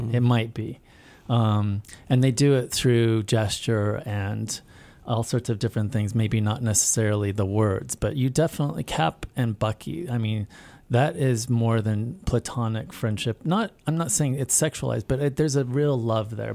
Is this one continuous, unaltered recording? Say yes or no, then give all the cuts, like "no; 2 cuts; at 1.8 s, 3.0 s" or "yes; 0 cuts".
yes; 0 cuts